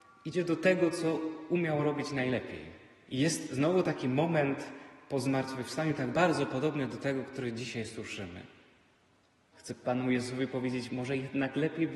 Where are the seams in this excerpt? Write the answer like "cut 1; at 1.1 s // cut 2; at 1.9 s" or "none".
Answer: cut 1; at 3.1 s // cut 2; at 9.5 s